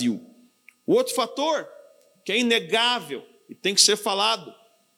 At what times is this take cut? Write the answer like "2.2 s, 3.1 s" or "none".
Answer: none

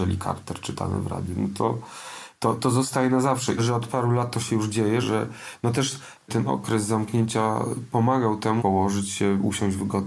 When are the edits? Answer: 3.6 s, 5.0 s, 8.6 s

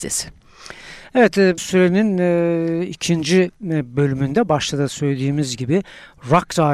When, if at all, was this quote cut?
1.6 s

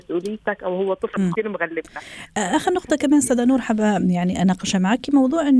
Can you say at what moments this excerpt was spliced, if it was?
1.3 s

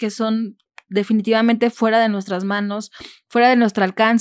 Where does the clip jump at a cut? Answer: none

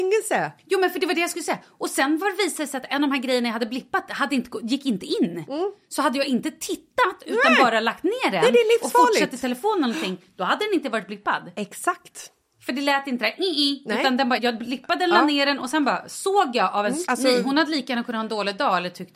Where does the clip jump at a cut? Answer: 14.4 s, 17.0 s

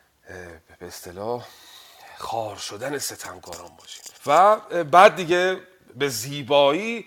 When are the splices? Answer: 4.2 s

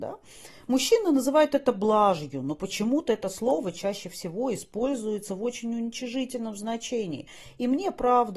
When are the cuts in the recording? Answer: none

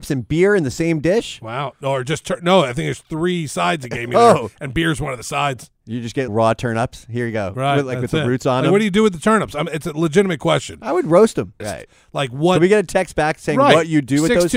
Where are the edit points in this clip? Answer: 6.3 s, 11.6 s

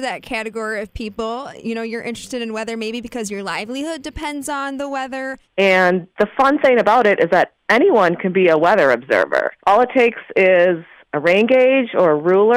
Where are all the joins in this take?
5.4 s, 9.6 s

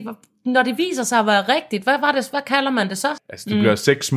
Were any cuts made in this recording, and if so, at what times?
3.2 s

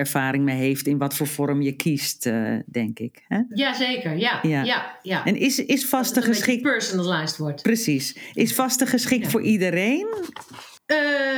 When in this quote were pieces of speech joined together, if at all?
none

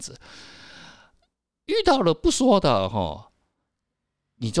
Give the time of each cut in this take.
none

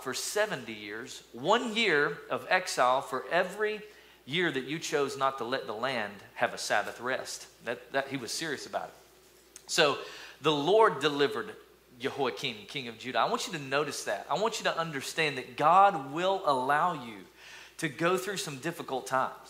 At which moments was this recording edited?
none

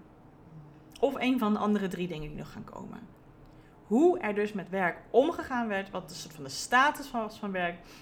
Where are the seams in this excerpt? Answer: none

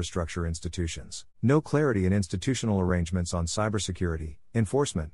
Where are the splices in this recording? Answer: 1.3 s

